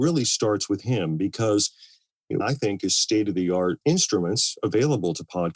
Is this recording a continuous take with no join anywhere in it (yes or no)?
no